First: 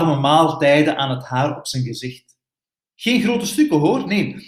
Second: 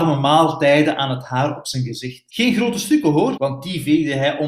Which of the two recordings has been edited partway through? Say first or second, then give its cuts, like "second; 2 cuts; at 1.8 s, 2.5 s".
second; 2 cuts; at 2.3 s, 3.4 s